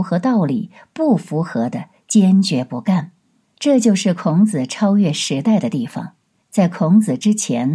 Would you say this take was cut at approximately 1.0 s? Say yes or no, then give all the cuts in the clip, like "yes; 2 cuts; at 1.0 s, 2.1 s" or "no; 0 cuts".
no; 2 cuts; at 3.4 s, 6.4 s